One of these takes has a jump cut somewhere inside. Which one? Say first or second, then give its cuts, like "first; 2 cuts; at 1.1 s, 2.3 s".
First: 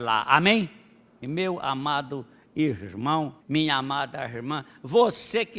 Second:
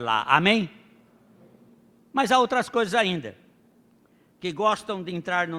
first; 2 cuts; at 1.2 s, 3.4 s